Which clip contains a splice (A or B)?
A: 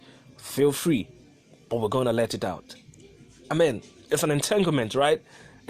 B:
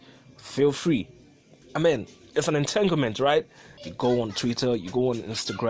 B